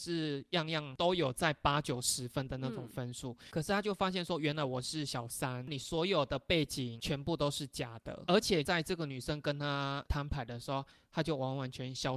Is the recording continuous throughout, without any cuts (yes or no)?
no